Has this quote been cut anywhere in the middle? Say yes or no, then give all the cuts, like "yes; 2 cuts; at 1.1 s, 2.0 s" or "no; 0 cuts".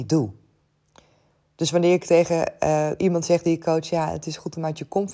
no; 0 cuts